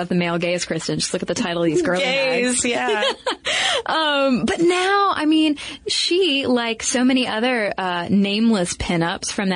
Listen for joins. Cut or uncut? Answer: uncut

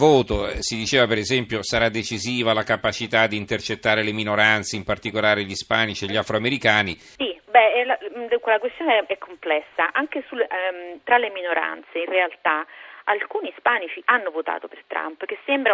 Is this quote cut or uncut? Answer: cut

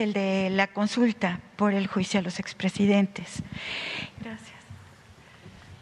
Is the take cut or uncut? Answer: cut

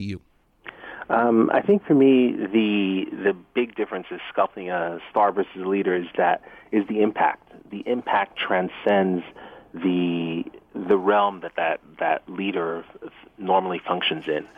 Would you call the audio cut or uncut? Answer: uncut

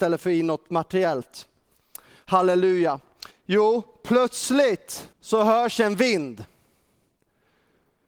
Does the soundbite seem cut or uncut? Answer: cut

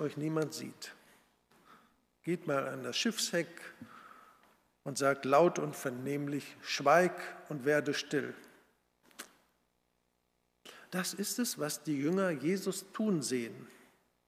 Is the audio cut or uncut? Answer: uncut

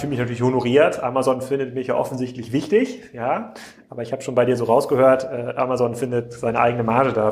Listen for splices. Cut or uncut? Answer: uncut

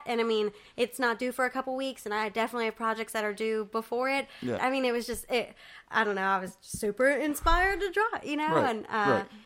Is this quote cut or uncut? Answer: cut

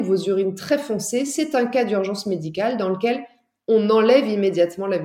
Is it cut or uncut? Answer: uncut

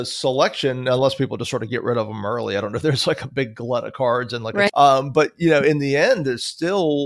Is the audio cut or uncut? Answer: cut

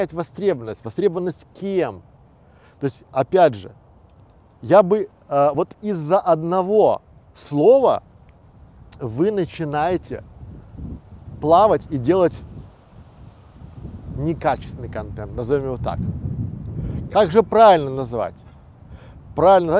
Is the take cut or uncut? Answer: uncut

